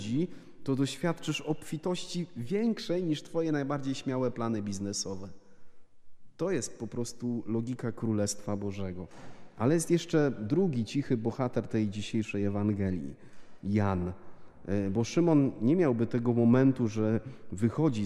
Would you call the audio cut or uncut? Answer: uncut